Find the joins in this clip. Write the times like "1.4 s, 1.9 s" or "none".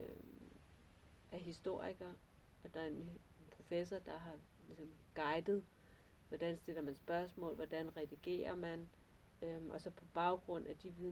none